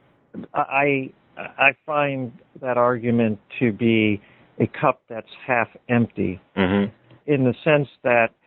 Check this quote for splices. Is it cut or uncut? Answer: uncut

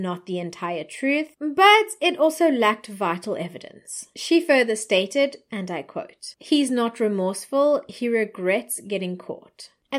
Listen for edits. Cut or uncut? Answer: uncut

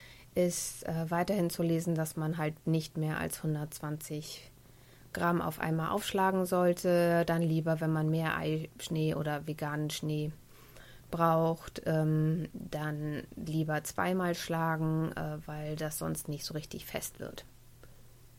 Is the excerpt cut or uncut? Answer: uncut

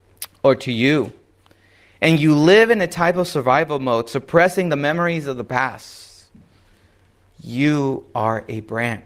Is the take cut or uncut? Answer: uncut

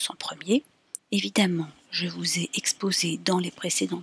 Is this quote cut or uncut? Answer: cut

